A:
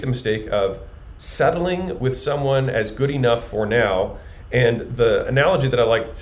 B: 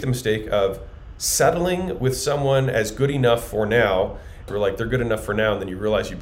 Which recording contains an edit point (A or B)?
B